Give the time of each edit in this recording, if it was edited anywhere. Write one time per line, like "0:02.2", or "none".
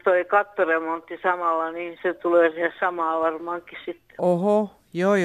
0:02.0